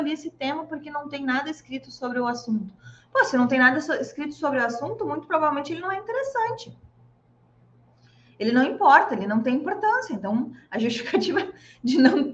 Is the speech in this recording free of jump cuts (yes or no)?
yes